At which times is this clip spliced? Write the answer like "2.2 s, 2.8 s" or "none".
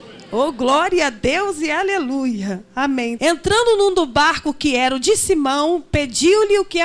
3.2 s